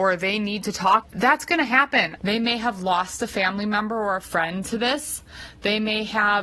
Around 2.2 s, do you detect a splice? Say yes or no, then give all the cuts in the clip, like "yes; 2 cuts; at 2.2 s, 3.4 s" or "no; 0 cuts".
yes; 2 cuts; at 1.0 s, 2.2 s